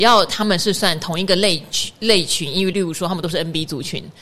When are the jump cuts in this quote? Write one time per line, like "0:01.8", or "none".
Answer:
0:02.7